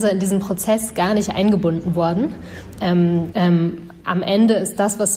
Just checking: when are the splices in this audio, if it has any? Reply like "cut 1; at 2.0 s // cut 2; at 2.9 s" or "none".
cut 1; at 3.3 s